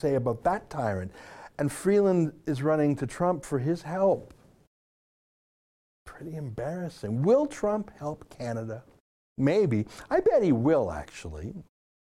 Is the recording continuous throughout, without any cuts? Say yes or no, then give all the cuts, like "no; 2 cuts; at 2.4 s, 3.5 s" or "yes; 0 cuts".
yes; 0 cuts